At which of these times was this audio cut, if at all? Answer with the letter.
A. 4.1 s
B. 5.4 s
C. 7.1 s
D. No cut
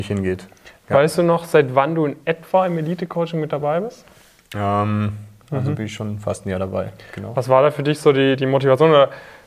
B